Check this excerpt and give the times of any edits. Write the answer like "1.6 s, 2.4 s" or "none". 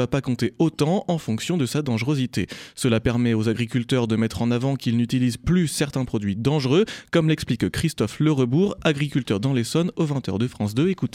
none